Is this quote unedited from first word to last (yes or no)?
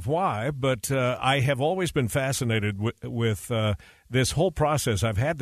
yes